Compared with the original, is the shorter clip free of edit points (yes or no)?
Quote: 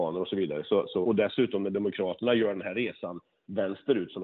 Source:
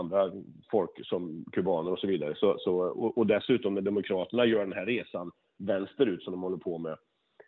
no